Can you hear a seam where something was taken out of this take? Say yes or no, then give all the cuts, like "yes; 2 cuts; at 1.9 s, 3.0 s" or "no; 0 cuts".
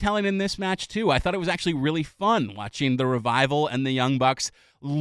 no; 0 cuts